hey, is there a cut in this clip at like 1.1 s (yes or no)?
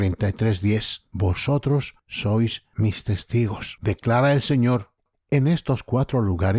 no